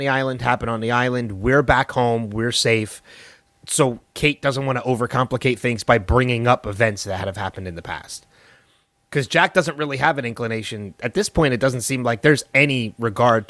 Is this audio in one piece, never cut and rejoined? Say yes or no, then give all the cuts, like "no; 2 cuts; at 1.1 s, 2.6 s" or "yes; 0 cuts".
yes; 0 cuts